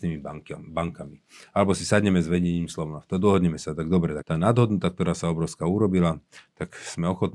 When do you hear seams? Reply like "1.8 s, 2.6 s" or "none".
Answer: 4.2 s